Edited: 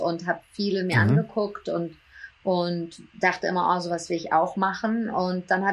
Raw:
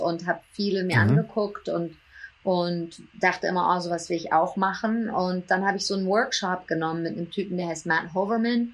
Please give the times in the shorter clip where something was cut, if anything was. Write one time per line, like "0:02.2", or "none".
none